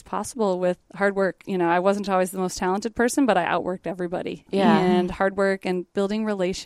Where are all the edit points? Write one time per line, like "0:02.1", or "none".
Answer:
none